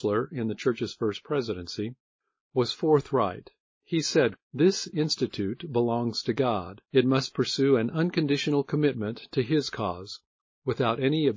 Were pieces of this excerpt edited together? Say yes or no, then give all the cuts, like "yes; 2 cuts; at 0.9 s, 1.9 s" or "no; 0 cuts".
yes; 2 cuts; at 4.4 s, 6.8 s